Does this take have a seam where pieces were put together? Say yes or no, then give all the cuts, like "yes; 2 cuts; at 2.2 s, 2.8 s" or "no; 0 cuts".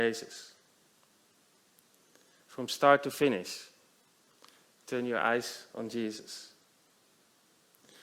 no; 0 cuts